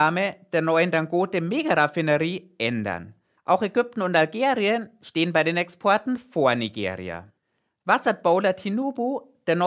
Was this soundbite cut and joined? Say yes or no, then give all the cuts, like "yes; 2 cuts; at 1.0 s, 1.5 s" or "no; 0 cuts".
yes; 1 cut; at 3.4 s